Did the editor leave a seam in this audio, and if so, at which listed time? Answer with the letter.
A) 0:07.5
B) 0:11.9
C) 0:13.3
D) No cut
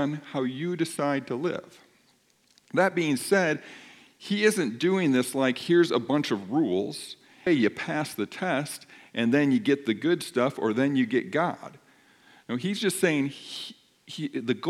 A